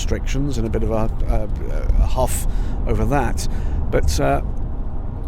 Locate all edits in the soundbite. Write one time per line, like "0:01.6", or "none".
none